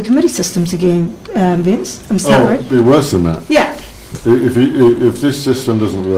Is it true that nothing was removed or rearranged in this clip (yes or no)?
yes